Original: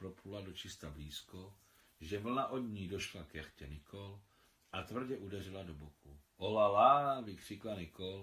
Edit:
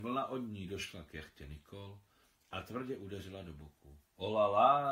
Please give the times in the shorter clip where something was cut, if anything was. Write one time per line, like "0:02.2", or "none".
none